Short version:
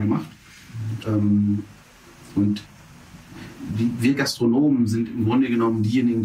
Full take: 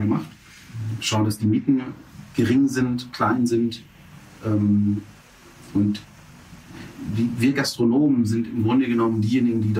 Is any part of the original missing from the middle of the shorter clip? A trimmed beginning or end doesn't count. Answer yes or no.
yes